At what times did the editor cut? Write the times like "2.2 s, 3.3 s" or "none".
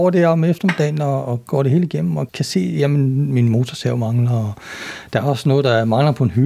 2.3 s